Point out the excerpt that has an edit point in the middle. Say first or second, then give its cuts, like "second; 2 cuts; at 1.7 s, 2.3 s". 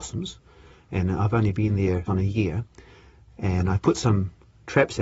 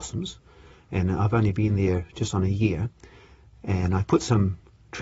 first; 1 cut; at 2.1 s